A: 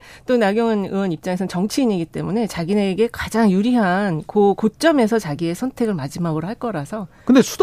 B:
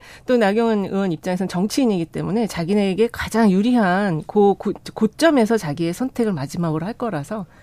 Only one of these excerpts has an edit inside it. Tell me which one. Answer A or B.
A